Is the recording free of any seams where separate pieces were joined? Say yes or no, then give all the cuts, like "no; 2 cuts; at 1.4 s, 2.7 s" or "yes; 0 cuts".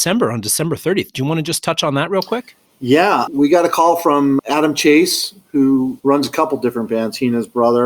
no; 1 cut; at 4.4 s